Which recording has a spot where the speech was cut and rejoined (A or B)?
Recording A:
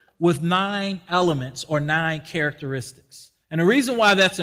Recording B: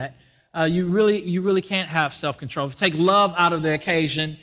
A